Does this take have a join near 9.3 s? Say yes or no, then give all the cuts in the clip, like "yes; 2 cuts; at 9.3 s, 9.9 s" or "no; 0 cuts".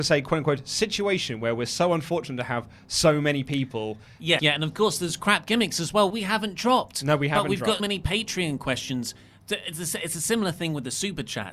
no; 3 cuts; at 4.4 s, 6.1 s, 7.8 s